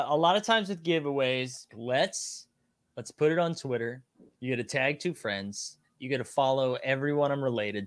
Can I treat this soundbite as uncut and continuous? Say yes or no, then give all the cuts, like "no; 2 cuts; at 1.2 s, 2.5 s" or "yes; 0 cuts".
no; 1 cut; at 1.7 s